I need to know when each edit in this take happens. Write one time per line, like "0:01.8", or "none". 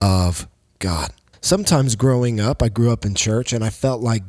0:01.3